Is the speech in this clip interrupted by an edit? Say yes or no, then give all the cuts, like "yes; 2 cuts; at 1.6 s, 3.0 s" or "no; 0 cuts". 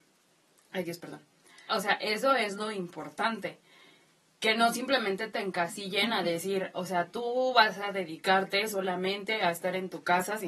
yes; 1 cut; at 1.7 s